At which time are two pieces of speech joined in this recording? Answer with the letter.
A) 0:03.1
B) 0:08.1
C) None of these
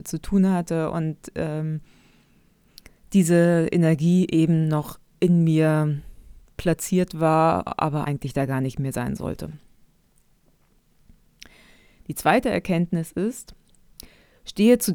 C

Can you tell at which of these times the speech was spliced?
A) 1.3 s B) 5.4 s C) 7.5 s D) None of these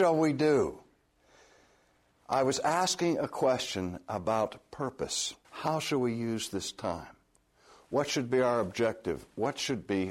B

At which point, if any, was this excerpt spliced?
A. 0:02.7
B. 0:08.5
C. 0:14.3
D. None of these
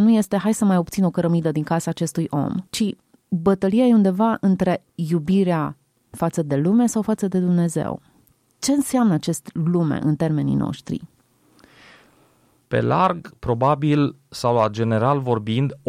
A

